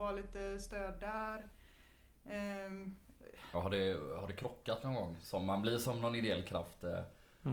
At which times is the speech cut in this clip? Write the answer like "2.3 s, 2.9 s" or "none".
3.5 s, 5.2 s